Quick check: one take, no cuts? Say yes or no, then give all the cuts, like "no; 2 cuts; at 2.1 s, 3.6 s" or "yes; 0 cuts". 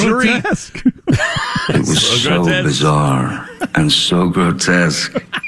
yes; 0 cuts